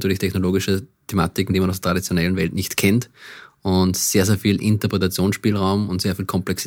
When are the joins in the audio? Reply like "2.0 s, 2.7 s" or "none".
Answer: none